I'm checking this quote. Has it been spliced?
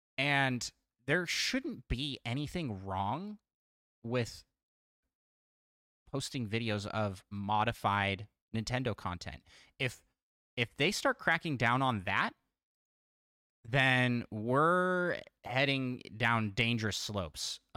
no; 0 cuts

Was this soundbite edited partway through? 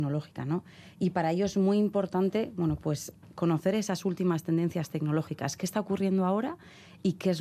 no; 0 cuts

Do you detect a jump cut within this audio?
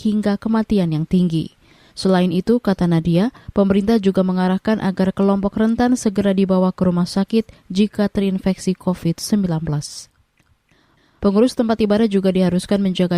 yes; 2 cuts; at 1.9 s, 11.2 s

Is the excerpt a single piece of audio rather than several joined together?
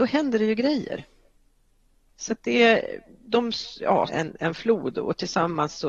no; 1 cut; at 4.1 s

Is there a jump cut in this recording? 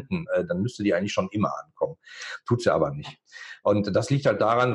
no; 0 cuts

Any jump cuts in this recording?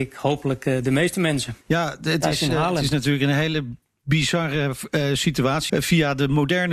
yes; 2 cuts; at 1.6 s, 5.7 s

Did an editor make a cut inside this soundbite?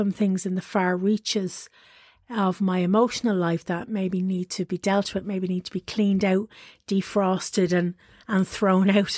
no; 0 cuts

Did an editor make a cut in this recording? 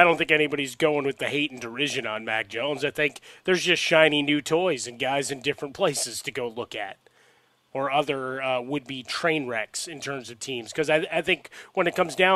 no; 0 cuts

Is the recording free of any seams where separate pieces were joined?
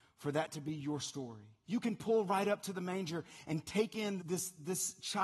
no; 2 cuts; at 1.6 s, 4.2 s

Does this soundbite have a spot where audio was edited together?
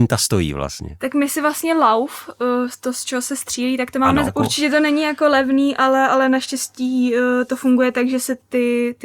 yes; 1 cut; at 4.3 s

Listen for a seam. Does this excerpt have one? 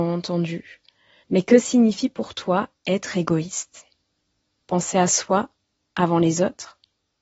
yes; 1 cut; at 1.2 s

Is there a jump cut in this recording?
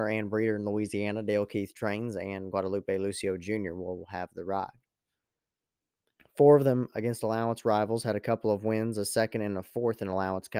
yes; 1 cut; at 6.2 s

